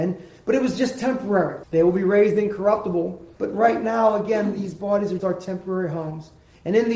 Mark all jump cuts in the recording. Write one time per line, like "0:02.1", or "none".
0:01.6
0:03.4
0:05.2